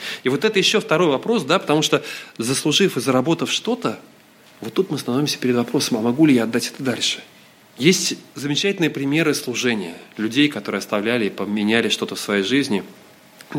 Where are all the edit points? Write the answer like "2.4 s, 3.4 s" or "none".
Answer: none